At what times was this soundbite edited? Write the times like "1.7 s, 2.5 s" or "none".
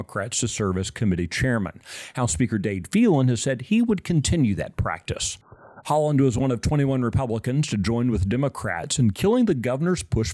5.8 s